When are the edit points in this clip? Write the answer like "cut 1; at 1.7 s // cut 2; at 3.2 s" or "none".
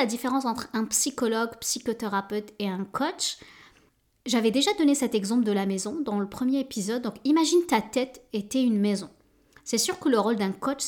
none